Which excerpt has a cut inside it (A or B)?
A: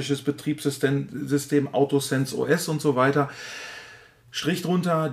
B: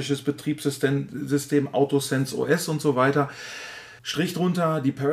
B